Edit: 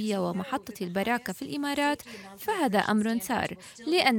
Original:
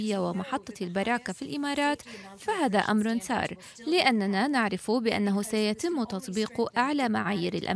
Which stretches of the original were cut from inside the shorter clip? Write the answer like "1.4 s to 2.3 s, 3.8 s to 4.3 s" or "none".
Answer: none